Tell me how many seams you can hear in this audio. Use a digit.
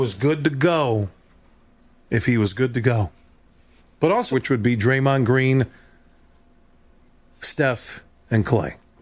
1